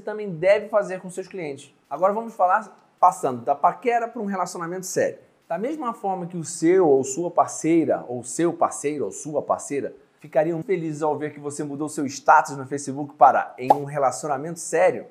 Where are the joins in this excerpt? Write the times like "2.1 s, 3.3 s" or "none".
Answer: 10.6 s